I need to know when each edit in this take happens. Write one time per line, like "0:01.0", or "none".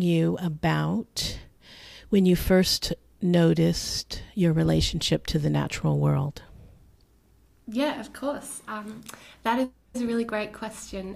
none